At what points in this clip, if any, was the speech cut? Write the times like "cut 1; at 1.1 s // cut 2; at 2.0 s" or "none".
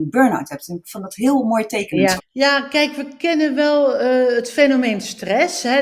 cut 1; at 2.2 s